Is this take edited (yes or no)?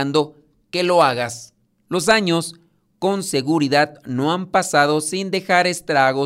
yes